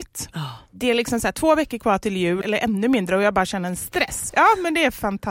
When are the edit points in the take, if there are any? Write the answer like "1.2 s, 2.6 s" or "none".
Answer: 2.4 s, 4.3 s